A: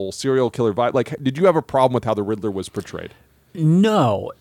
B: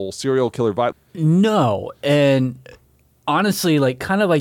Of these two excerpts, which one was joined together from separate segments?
B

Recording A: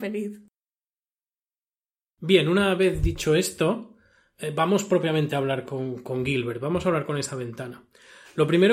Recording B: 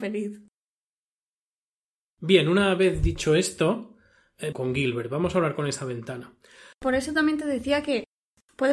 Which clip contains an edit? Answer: B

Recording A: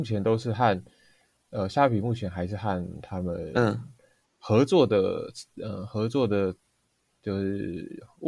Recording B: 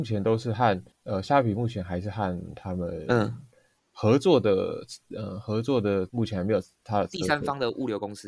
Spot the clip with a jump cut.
B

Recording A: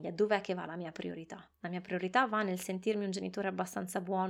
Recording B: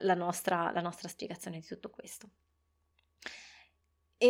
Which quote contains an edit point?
A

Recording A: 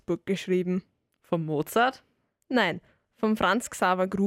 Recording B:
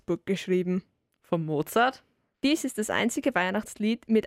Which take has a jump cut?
B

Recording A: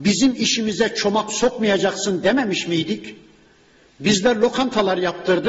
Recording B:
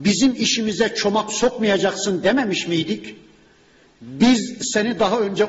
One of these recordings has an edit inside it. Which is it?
B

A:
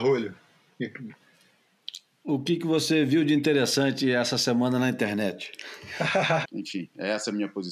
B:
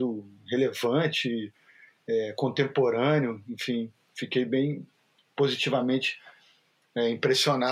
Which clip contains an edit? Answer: A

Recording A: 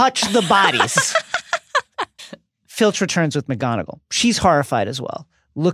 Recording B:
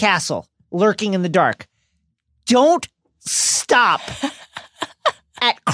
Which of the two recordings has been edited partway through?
A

